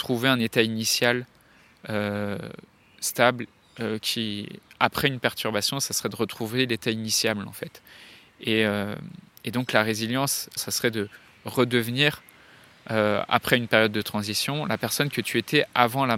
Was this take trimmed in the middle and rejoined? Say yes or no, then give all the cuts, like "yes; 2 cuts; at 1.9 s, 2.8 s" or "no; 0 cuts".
yes; 1 cut; at 10.6 s